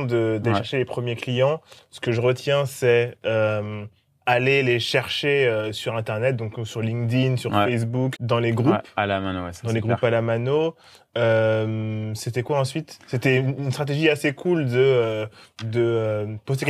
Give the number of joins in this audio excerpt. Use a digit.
1